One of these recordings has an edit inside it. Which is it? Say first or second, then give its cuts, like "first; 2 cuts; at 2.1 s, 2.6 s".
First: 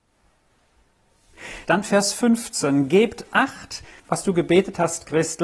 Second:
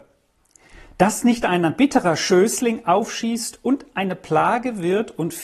first; 2 cuts; at 1.7 s, 4.0 s